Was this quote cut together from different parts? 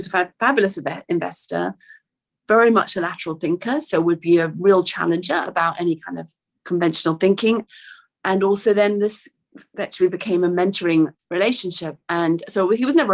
no; 0 cuts

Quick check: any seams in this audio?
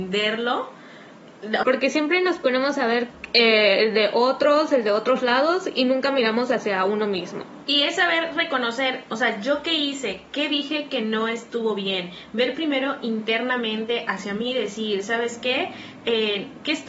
yes; 2 cuts; at 1.6 s, 7.6 s

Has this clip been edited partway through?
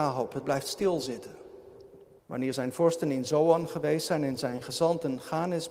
yes; 1 cut; at 2.2 s

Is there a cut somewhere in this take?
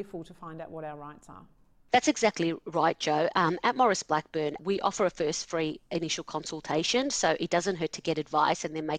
yes; 1 cut; at 4.6 s

